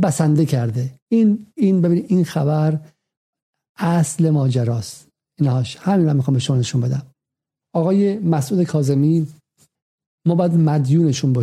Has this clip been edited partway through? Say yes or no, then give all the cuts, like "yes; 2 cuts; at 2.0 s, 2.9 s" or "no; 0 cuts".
yes; 1 cut; at 7.6 s